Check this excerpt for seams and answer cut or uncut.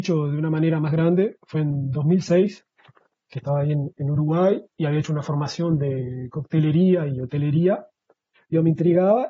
cut